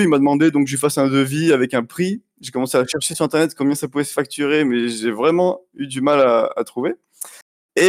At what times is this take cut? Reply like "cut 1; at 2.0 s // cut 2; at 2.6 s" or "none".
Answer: none